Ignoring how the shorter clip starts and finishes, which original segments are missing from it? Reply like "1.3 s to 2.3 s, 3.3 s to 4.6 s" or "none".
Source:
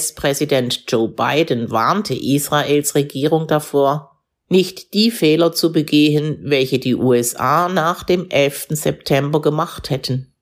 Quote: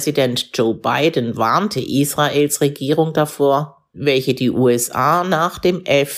4.3 s to 6.4 s